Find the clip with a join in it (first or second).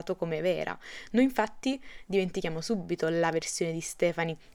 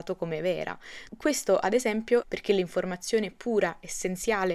second